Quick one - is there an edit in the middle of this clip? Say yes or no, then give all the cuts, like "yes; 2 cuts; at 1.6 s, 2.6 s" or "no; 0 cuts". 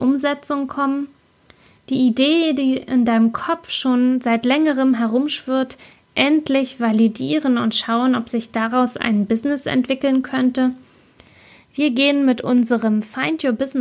no; 0 cuts